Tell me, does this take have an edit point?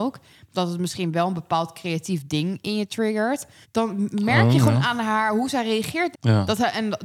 yes; 2 cuts; at 3.6 s, 6.1 s

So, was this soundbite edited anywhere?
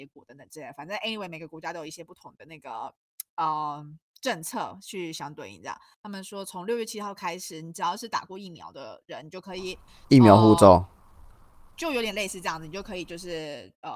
yes; 1 cut; at 5.9 s

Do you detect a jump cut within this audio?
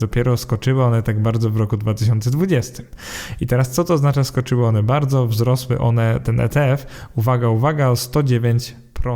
no; 0 cuts

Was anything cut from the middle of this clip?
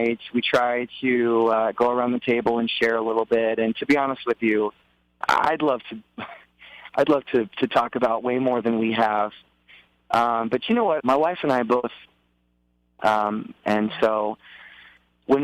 yes; 2 cuts; at 11.0 s, 13.6 s

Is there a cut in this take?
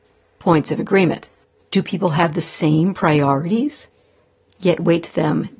yes; 1 cut; at 1.6 s

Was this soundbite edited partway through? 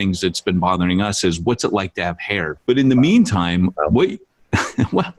yes; 1 cut; at 2.6 s

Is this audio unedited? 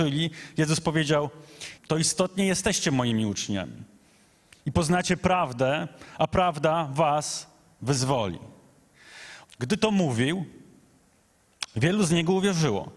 no; 2 cuts; at 1.8 s, 9.4 s

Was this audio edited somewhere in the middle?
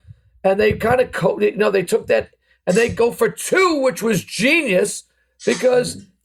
no; 0 cuts

